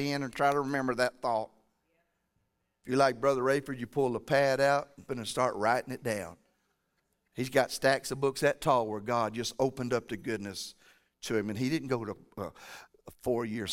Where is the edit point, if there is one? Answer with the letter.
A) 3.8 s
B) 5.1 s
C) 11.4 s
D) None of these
B